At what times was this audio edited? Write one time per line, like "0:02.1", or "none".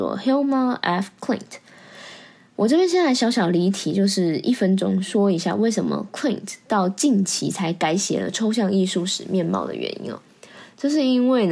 none